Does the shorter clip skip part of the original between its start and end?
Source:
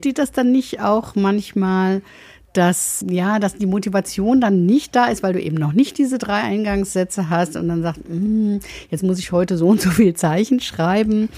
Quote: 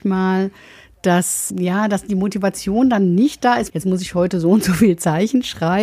yes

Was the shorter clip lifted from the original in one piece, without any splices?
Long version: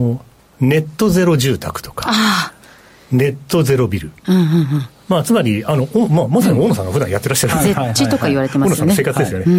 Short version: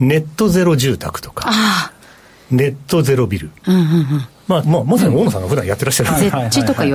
no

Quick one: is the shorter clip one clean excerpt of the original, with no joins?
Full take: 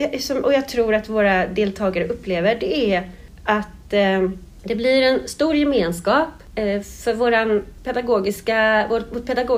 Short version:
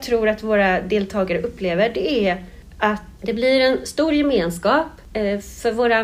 no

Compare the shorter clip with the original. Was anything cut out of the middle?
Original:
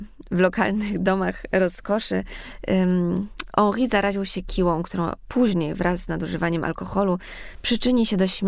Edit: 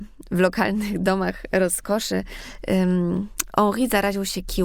no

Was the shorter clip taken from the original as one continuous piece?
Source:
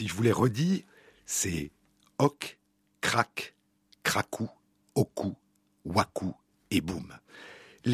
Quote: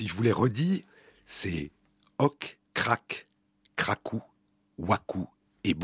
no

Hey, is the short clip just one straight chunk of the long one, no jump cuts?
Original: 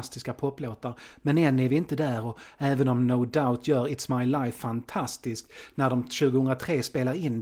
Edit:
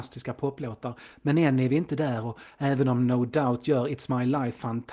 yes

